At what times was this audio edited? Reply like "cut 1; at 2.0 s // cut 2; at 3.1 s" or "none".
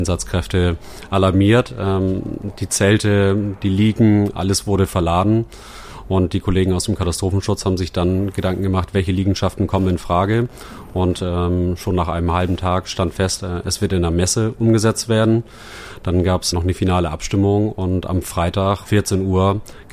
cut 1; at 16.5 s // cut 2; at 18.8 s